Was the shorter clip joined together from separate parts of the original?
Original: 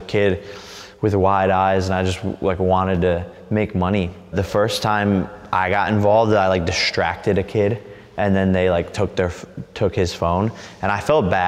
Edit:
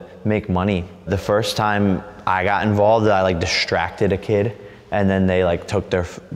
no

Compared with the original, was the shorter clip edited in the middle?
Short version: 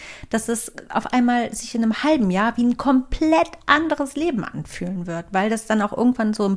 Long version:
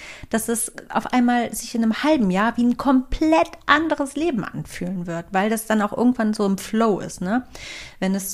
no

